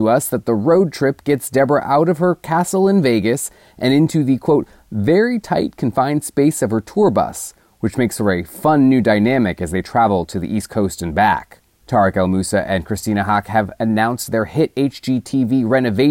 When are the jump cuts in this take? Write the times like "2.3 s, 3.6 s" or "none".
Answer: 11.8 s